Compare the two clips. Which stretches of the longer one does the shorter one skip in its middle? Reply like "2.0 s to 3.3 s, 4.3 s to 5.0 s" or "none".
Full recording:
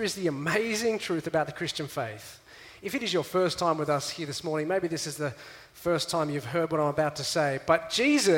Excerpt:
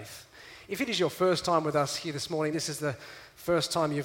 4.6 s to 4.9 s